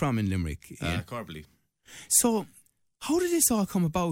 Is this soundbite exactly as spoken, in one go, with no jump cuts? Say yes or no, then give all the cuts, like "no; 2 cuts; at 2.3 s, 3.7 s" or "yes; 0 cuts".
yes; 0 cuts